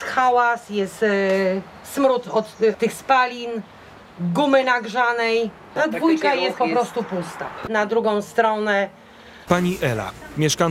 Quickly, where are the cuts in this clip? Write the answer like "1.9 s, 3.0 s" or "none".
2.7 s, 7.7 s, 9.5 s